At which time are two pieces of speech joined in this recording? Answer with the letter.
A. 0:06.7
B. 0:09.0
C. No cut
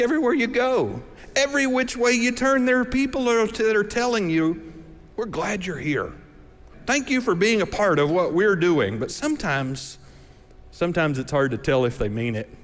A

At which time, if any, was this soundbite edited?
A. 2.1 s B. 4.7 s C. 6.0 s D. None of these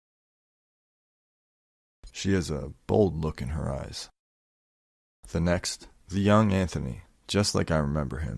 A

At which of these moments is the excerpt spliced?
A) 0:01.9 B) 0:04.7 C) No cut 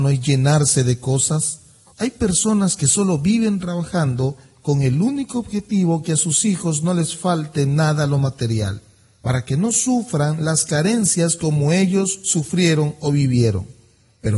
A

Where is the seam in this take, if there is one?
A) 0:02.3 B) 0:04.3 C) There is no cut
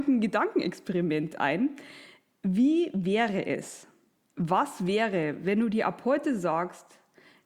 B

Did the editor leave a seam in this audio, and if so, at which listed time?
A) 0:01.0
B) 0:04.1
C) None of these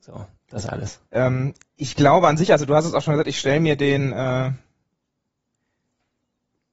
A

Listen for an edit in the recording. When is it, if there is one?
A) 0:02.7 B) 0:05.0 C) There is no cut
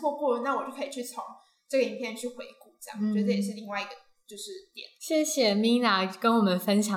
B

